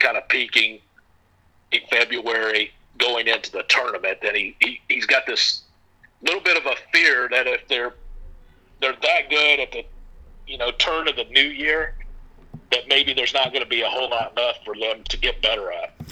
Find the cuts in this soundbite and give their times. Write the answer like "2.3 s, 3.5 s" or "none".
15.0 s

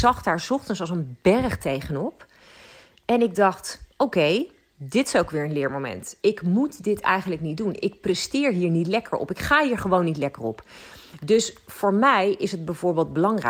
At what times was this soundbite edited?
none

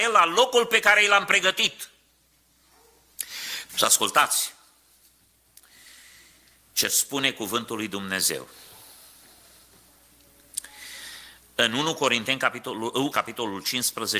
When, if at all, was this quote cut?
3.7 s, 13.1 s

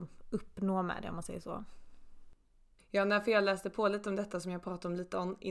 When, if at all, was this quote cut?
2.8 s

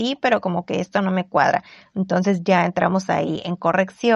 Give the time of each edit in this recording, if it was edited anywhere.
none

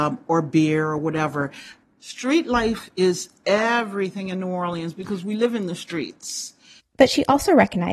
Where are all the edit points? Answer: 1.8 s, 6.8 s

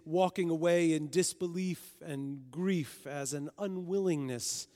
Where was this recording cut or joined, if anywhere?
none

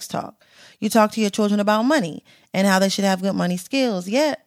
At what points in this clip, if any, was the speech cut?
none

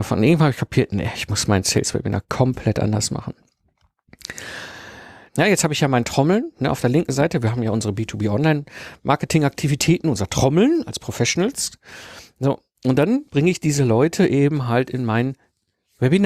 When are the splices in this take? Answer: 5.3 s

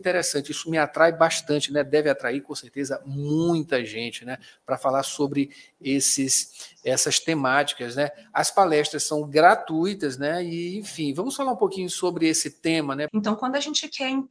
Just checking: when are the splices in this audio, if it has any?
13.1 s

